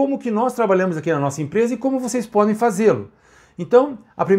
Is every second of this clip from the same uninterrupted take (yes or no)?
yes